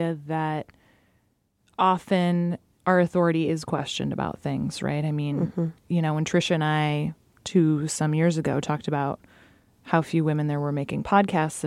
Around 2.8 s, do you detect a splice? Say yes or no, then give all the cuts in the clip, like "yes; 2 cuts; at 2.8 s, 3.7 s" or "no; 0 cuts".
yes; 1 cut; at 2.8 s